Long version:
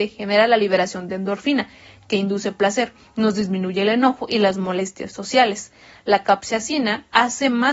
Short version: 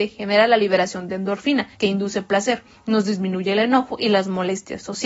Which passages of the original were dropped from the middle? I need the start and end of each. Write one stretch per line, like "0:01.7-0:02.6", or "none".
0:01.7-0:02.0